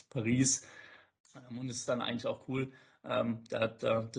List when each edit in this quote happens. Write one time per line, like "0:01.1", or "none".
0:01.2